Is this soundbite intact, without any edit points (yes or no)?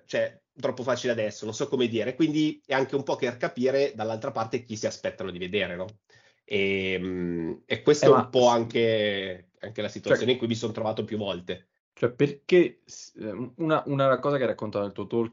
yes